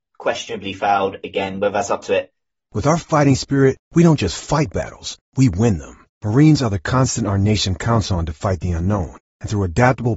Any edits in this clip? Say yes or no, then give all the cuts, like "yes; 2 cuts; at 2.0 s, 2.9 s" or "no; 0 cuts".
yes; 1 cut; at 2.7 s